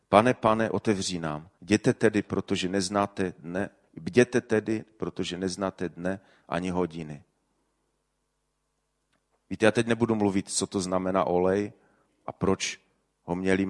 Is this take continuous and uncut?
no; 1 cut; at 1.6 s

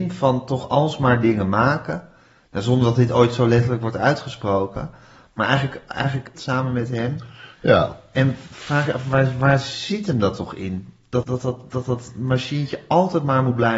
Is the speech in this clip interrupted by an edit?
yes; 2 cuts; at 6.4 s, 11.2 s

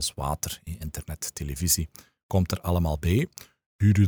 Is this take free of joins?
yes; 0 cuts

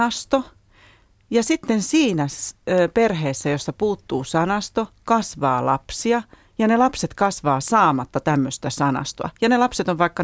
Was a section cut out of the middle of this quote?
no; 0 cuts

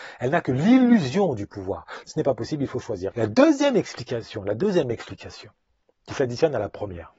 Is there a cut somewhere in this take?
yes; 2 cuts; at 2.0 s, 3.1 s

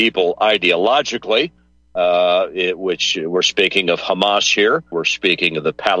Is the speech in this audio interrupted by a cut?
yes; 1 cut; at 4.9 s

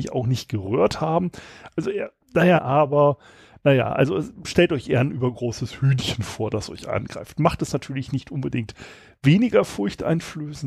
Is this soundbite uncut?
no; 1 cut; at 2.6 s

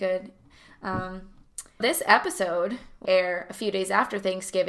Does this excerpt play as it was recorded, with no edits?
no; 2 cuts; at 1.8 s, 3.1 s

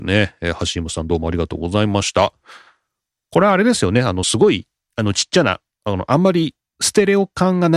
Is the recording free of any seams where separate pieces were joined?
yes; 0 cuts

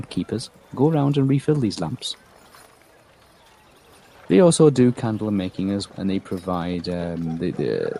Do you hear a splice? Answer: yes; 2 cuts; at 4.1 s, 5.9 s

